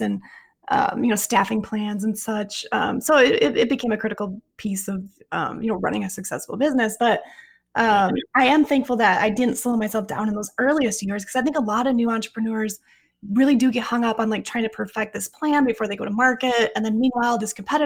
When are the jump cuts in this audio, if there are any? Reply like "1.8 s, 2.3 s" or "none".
none